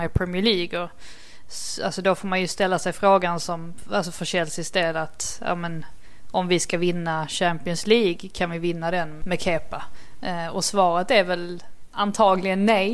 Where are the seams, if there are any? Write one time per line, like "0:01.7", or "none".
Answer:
0:09.2